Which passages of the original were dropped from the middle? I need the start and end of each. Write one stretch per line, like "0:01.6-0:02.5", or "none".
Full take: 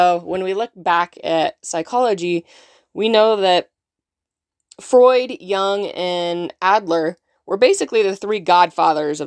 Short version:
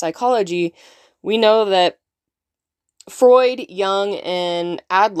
none

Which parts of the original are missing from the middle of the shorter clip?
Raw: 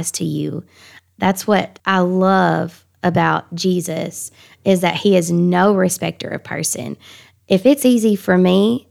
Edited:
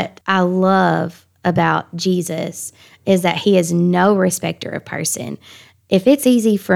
none

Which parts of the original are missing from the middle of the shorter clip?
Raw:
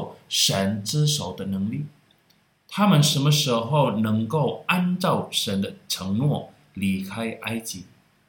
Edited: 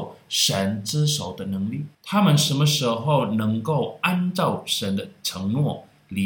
0:01.9-0:02.6

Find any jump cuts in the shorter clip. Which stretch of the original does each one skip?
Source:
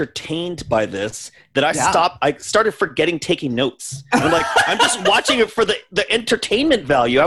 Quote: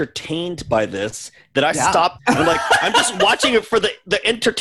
0:02.2-0:04.0

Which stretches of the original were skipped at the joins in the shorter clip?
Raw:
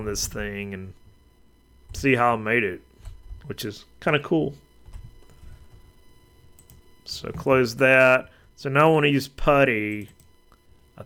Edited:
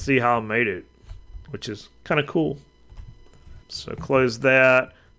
0:05.6-0:07.0

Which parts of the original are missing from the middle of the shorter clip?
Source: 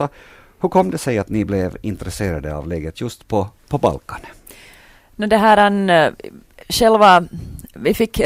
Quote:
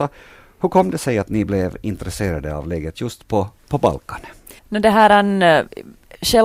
0:04.6-0:05.1

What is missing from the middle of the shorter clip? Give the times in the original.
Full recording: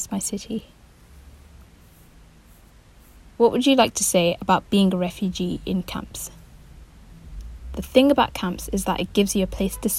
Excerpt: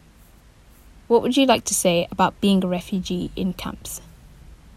none

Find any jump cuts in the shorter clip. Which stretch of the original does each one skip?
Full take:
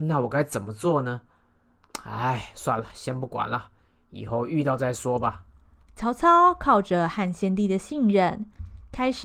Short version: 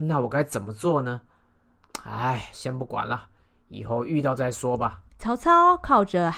0:02.5-0:02.9
0:05.5-0:05.8

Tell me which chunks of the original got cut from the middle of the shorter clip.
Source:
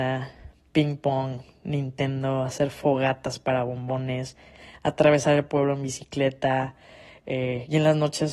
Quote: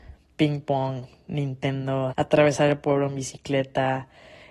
0:02.5-0:04.8

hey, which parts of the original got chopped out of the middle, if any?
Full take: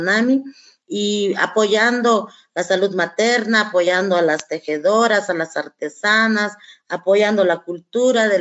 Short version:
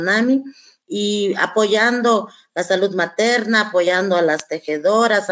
none

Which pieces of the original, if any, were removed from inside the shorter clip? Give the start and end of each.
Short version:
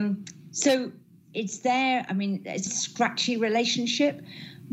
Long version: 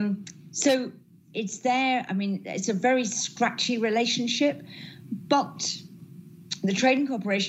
0:02.7-0:03.1

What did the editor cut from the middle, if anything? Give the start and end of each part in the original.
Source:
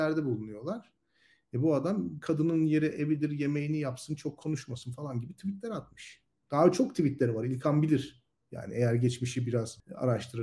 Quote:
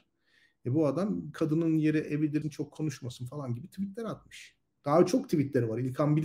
0:03.3-0:04.1

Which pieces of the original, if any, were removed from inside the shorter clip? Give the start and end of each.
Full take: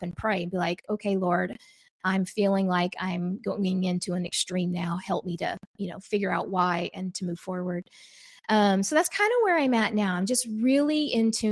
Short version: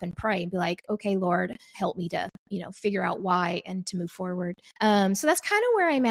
0:01.7-0:05.0
0:08.0-0:08.4

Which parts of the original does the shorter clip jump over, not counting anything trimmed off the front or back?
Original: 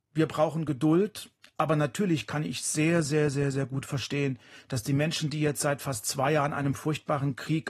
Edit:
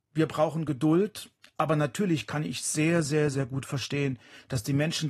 0:03.3-0:03.5

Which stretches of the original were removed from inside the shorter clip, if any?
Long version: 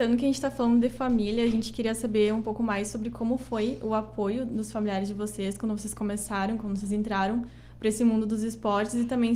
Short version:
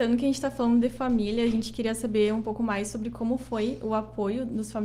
none

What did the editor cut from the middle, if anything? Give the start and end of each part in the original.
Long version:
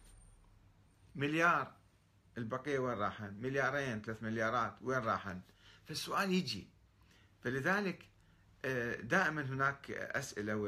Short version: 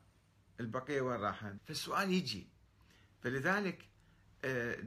0:03.4-0:05.8

